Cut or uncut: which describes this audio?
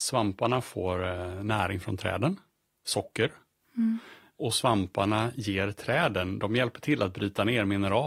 uncut